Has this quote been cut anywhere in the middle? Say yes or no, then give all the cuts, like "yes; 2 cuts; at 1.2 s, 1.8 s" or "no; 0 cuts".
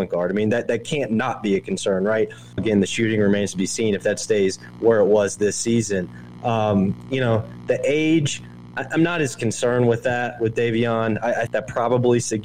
yes; 2 cuts; at 2.6 s, 11.5 s